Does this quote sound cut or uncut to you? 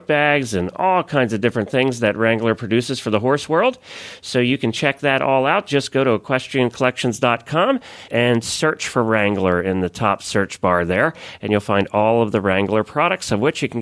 cut